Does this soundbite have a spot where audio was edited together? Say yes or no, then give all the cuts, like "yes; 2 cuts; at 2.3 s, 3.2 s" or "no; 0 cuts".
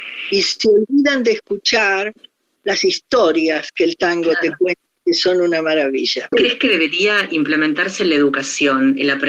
yes; 1 cut; at 6.3 s